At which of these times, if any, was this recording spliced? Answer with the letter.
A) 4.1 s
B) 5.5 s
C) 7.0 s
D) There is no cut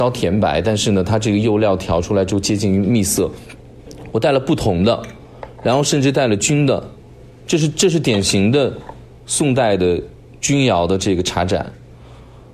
D